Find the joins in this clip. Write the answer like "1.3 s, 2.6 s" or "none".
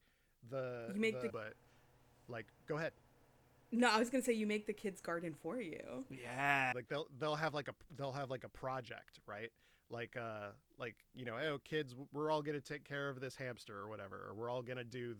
1.3 s, 6.7 s